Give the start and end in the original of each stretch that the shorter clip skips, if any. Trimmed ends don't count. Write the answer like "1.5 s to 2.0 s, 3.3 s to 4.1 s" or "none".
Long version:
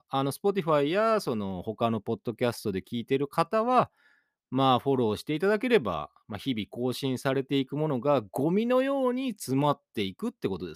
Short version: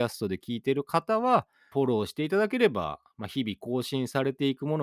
4.2 s to 4.8 s